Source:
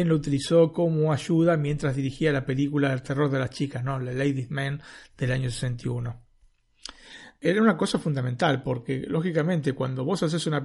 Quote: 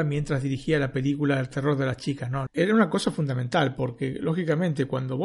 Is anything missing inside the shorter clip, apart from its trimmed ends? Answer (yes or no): yes